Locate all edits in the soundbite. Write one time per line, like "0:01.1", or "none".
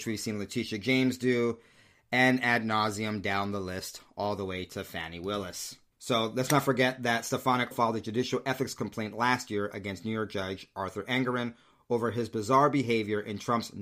0:05.9
0:07.7